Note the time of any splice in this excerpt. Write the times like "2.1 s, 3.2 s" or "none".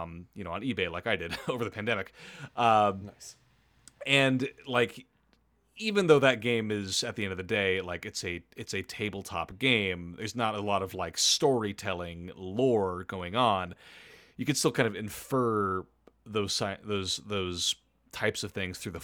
none